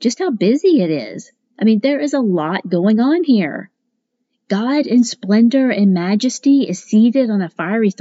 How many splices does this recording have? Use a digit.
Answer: 0